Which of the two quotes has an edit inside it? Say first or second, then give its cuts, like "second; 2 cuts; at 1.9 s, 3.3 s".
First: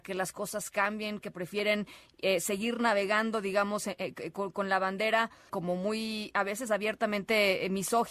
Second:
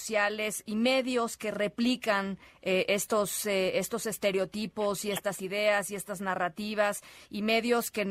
first; 2 cuts; at 1.2 s, 5.5 s